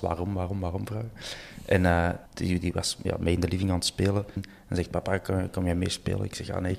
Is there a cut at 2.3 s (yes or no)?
yes